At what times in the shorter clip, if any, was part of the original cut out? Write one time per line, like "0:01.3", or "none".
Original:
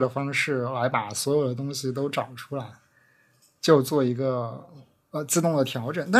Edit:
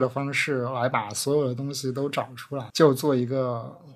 0:02.7